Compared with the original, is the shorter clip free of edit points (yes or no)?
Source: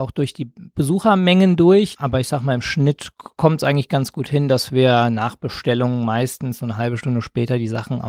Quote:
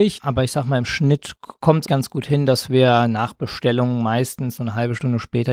no